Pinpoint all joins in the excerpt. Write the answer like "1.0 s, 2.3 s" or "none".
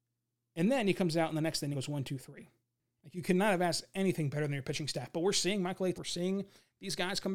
1.7 s, 5.9 s